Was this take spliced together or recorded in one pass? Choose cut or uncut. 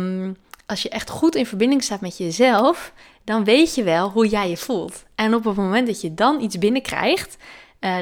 uncut